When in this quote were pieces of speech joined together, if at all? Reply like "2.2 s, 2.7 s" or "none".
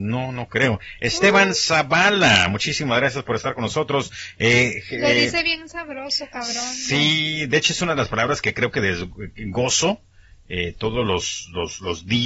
none